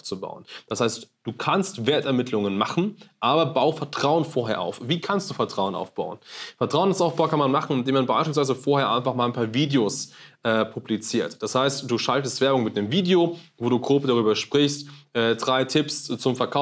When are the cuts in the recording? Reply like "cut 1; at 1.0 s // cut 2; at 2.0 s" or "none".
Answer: none